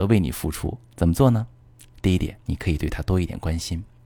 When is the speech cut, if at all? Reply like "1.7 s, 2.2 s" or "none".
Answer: 0.9 s, 2.4 s